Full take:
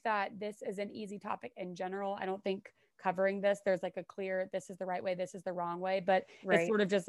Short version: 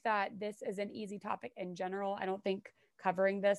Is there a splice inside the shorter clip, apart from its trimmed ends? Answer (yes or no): no